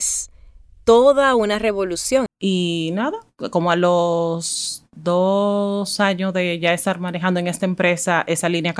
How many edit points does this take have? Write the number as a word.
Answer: one